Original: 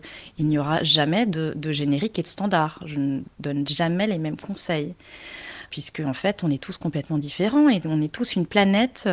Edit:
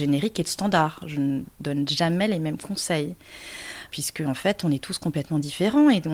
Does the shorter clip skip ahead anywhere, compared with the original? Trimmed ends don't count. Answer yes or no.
no